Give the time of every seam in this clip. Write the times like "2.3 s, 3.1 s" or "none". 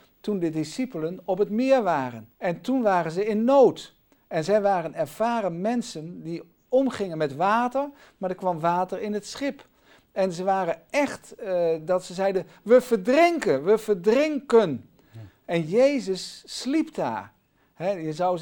2.3 s